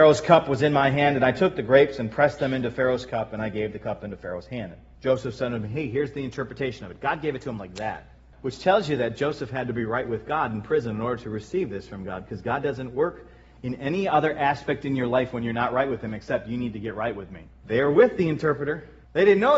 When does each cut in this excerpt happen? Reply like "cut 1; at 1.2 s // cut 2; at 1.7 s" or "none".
cut 1; at 17.6 s